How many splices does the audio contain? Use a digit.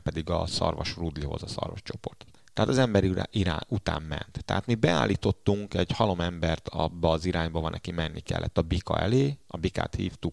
0